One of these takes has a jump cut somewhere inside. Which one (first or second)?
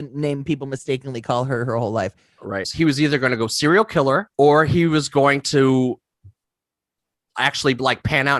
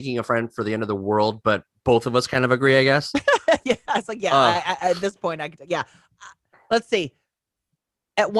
first